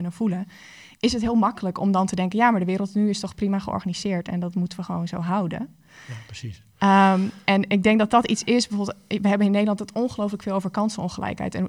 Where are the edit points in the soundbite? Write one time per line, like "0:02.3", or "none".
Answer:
none